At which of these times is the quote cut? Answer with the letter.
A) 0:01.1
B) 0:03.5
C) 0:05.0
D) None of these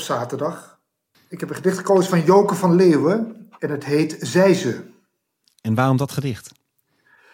A